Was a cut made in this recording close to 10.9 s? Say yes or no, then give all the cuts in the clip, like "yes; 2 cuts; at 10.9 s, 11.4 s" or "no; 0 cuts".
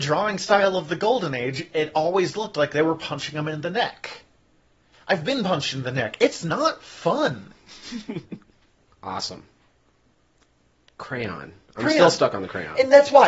no; 0 cuts